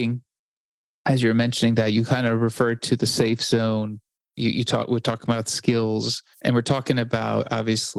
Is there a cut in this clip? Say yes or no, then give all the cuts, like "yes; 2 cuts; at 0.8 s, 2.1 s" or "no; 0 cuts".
yes; 1 cut; at 6.3 s